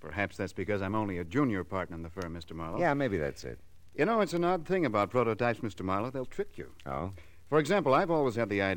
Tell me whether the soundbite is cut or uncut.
uncut